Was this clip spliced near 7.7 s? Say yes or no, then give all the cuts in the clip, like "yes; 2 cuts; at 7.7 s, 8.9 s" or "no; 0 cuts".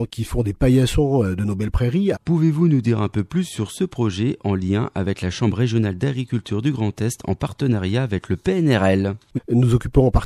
no; 2 cuts; at 2.1 s, 9.4 s